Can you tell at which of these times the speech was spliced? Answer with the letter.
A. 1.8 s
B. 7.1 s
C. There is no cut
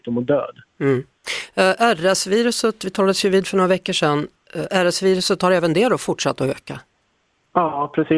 C